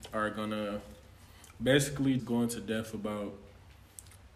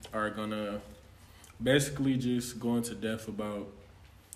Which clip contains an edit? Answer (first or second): first